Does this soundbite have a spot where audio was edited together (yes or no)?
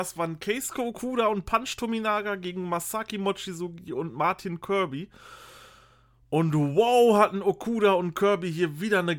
no